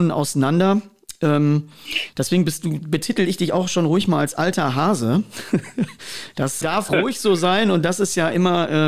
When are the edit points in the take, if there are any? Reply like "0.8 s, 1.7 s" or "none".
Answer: 6.6 s